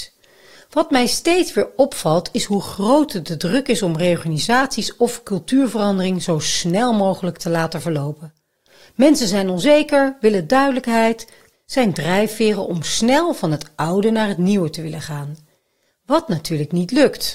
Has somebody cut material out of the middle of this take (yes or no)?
yes